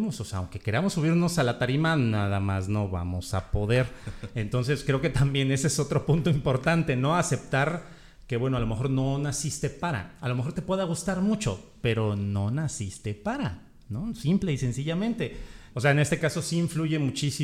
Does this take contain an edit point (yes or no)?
yes